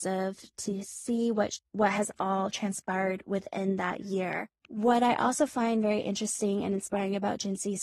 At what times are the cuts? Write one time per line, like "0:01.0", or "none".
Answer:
none